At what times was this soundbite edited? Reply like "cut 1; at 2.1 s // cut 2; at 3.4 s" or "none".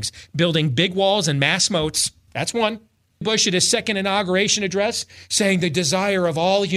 cut 1; at 3.2 s